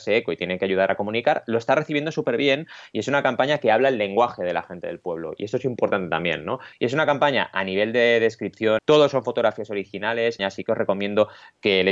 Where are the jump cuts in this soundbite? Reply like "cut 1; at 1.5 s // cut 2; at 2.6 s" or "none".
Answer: cut 1; at 6.7 s // cut 2; at 8.8 s // cut 3; at 10.4 s